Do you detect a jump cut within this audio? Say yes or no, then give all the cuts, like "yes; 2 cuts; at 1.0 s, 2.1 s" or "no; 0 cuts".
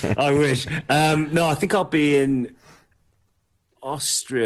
no; 0 cuts